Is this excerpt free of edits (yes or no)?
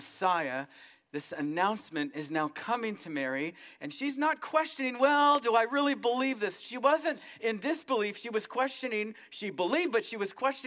yes